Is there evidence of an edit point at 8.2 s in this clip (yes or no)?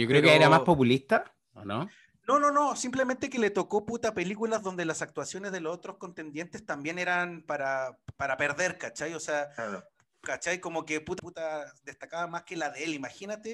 yes